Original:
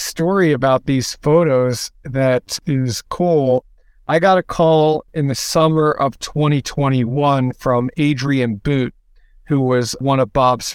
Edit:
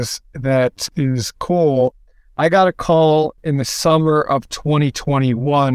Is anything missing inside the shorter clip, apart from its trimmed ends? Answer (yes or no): no